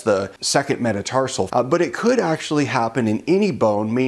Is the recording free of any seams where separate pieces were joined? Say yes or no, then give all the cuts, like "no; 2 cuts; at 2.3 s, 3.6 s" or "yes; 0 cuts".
no; 1 cut; at 1.5 s